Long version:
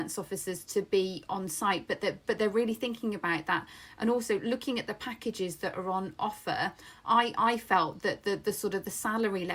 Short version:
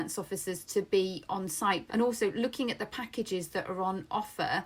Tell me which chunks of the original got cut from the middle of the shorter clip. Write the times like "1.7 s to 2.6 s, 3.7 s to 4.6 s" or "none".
1.9 s to 3.9 s

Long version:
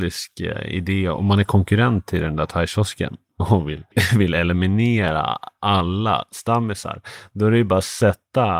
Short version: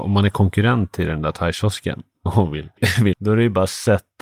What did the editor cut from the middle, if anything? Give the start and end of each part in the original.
4.3 s to 7.3 s

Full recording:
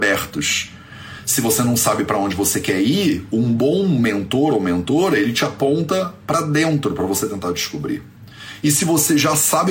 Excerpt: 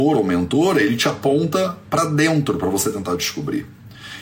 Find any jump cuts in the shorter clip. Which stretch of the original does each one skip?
none

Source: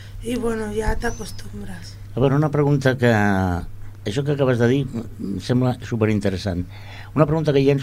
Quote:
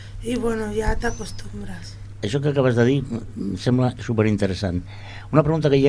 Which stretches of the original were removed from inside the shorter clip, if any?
2.1 s to 3.9 s

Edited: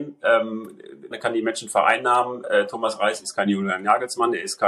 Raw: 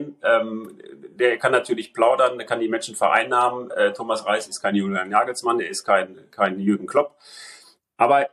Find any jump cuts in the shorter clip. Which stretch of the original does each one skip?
1.1 s to 2.4 s

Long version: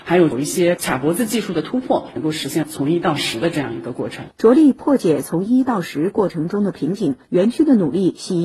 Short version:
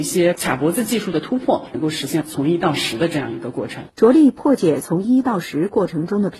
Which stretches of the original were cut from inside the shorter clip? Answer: none

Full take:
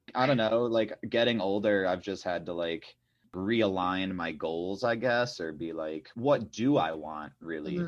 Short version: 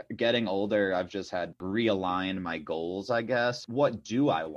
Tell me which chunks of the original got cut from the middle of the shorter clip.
2.5 s to 3.3 s, 5.4 s to 6.1 s

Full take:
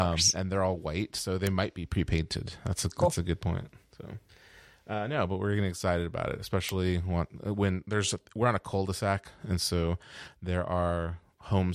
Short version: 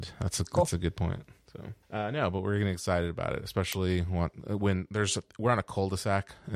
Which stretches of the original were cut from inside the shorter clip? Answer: 4.3 s to 4.8 s

